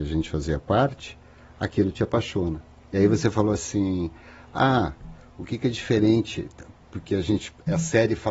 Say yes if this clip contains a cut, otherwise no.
no